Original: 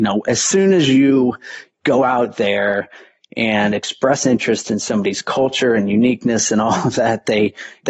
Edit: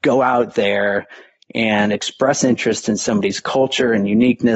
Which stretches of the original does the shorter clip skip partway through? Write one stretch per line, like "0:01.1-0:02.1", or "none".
none

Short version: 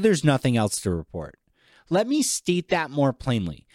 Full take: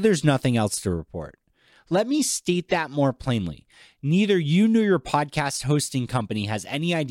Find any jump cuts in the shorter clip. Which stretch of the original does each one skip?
none

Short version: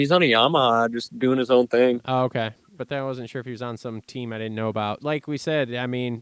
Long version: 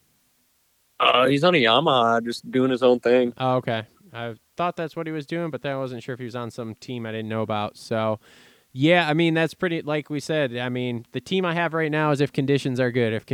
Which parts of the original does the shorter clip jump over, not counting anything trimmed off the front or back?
0:04.1-0:05.5
0:07.7-0:09.8

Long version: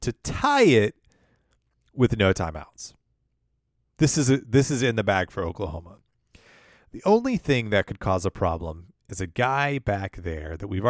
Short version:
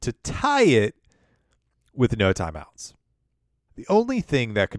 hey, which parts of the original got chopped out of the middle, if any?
0:03.7-0:06.8

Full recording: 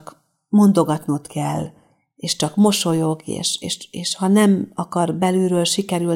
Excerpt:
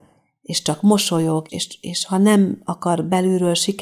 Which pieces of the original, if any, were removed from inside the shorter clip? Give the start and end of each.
0:03.2-0:03.6

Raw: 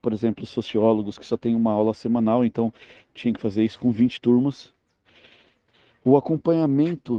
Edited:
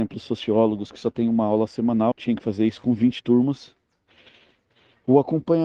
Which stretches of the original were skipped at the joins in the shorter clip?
0:02.4-0:03.1

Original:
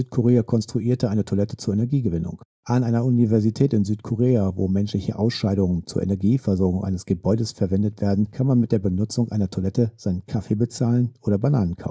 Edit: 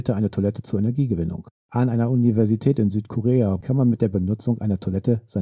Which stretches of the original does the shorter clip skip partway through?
0:04.5-0:08.3

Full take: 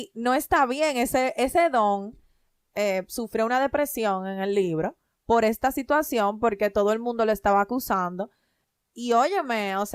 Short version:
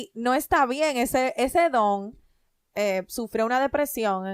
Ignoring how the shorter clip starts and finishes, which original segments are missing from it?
none

